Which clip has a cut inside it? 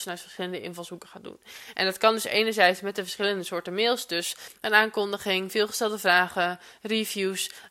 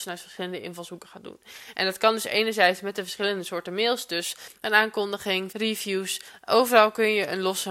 second; 1 cut; at 5.5 s

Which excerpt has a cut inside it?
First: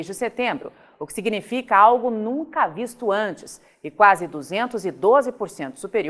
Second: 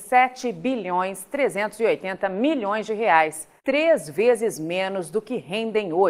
second; 1 cut; at 3.6 s

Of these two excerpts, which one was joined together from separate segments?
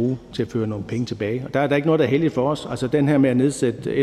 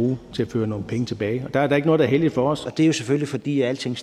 second; 1 cut; at 2.6 s

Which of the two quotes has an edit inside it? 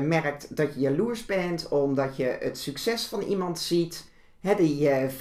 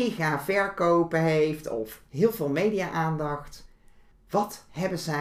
second; 1 cut; at 4.1 s

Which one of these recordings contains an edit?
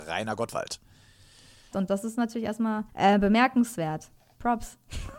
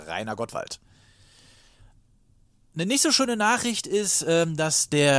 first; 2 cuts; at 1.7 s, 2.9 s

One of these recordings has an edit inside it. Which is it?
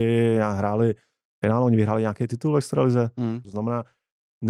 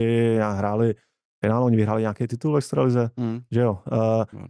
first; 1 cut; at 3.4 s

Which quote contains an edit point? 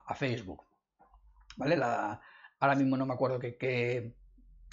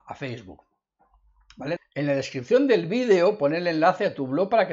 second; 1 cut; at 1.8 s

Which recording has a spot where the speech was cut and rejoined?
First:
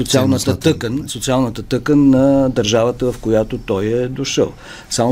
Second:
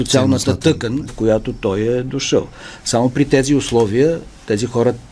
second; 1 cut; at 1.1 s

